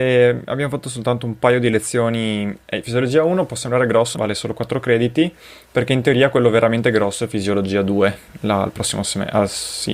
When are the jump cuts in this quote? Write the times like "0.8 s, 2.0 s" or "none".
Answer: 4.1 s